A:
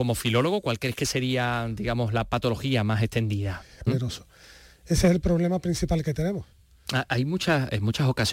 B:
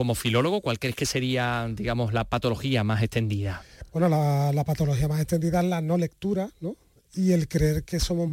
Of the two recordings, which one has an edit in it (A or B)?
A